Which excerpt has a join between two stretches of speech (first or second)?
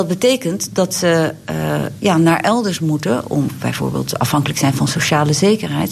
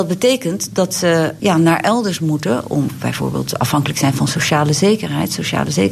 second